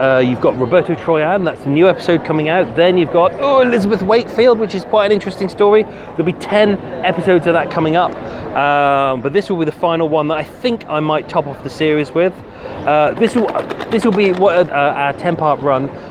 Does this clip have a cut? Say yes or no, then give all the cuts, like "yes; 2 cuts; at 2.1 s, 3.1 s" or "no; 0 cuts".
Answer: yes; 2 cuts; at 13.1 s, 14.7 s